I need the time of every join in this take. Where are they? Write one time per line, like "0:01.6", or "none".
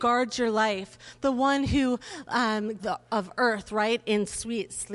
0:02.8